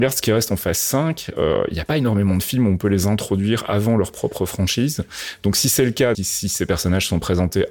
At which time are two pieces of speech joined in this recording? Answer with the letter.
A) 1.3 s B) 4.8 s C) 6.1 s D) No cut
C